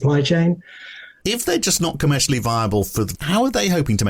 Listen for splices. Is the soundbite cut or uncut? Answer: cut